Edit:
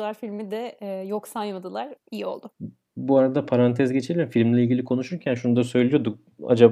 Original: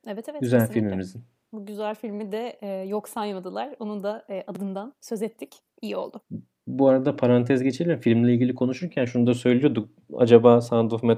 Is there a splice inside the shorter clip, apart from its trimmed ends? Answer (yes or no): yes